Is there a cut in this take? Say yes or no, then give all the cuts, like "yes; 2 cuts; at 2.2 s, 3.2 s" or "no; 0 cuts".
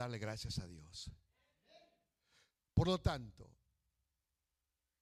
no; 0 cuts